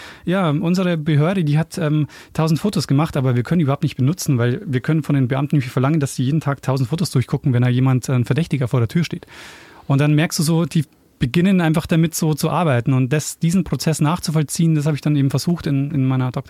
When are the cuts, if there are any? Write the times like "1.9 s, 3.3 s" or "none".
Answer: none